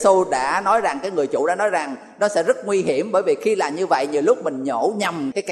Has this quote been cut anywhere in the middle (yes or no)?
no